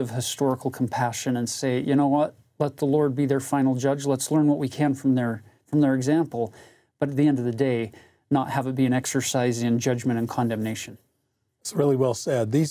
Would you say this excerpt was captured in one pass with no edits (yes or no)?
yes